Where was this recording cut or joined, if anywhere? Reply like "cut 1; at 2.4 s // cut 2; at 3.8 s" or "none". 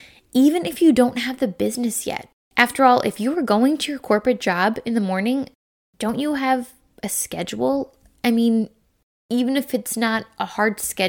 none